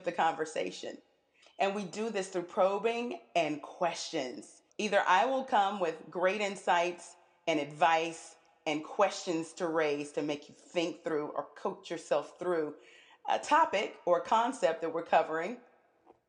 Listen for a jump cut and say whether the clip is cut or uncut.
cut